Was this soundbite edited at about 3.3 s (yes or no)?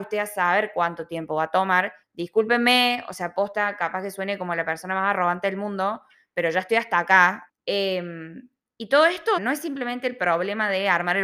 no